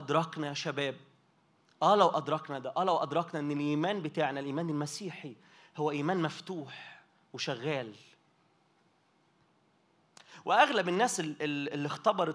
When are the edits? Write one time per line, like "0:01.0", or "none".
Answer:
none